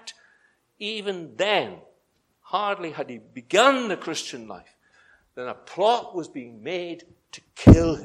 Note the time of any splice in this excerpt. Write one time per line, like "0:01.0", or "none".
none